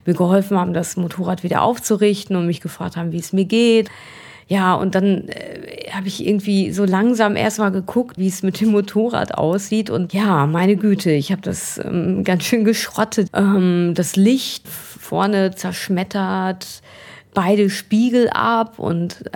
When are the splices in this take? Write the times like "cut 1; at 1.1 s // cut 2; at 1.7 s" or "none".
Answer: cut 1; at 8.2 s // cut 2; at 13.3 s // cut 3; at 14.6 s